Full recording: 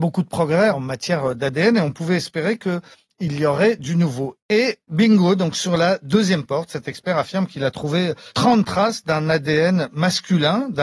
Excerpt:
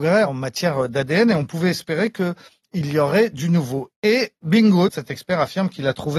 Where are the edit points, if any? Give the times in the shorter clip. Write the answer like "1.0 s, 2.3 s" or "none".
4.9 s